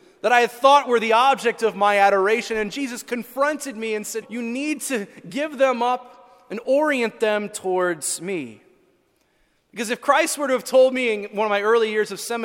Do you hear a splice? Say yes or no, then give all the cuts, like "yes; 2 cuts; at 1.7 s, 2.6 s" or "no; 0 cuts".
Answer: yes; 1 cut; at 4.2 s